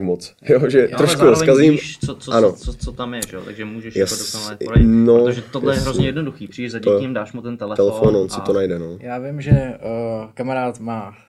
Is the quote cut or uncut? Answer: uncut